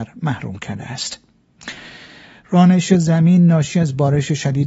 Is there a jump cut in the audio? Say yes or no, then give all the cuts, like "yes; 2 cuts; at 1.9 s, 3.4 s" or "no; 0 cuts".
no; 0 cuts